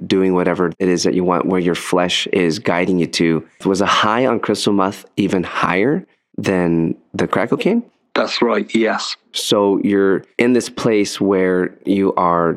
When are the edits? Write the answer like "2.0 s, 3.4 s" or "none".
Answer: 3.6 s, 9.3 s